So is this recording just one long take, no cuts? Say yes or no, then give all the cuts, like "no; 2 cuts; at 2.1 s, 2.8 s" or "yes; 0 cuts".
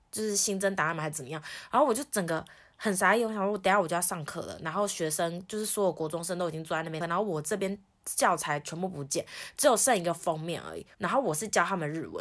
no; 2 cuts; at 7.0 s, 10.9 s